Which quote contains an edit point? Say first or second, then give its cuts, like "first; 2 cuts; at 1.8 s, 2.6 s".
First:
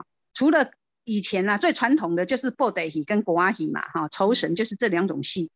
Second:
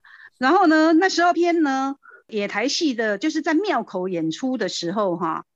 second; 1 cut; at 1.3 s